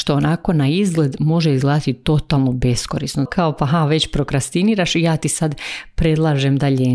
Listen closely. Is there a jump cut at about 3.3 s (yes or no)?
yes